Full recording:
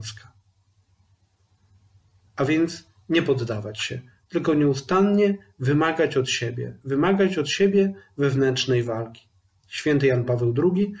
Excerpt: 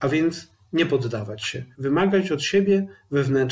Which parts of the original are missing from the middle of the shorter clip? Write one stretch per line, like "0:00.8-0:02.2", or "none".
0:04.1-0:06.8